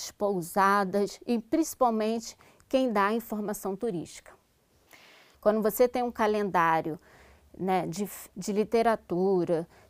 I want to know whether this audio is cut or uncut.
cut